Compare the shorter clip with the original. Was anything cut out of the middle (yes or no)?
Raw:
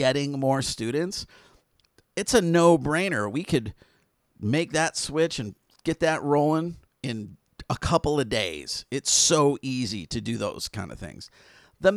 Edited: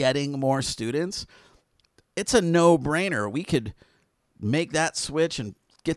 no